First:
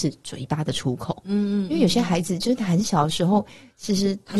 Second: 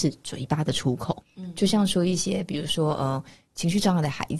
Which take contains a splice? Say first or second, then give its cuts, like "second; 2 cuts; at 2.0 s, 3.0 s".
second; 1 cut; at 1.2 s